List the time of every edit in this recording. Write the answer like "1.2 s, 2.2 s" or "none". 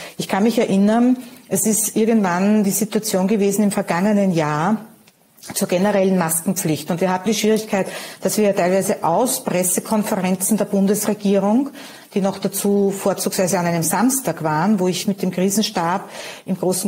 7.3 s, 15.0 s